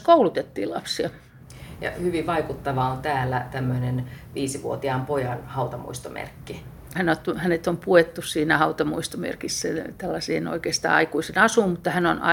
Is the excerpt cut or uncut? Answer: cut